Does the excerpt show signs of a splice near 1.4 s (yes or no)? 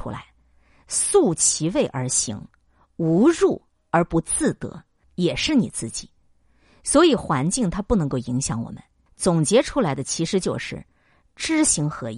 no